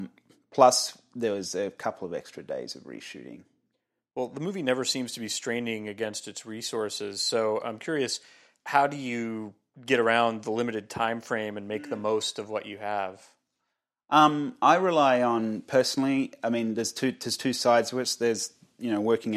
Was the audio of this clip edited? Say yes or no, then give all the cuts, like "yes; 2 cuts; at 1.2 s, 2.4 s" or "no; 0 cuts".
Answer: no; 0 cuts